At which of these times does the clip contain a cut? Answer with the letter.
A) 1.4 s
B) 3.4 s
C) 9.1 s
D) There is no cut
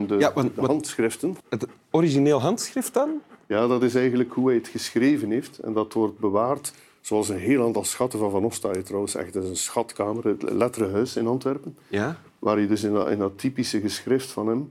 A